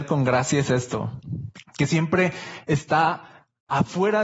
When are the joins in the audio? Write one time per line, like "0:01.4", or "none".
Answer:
0:01.6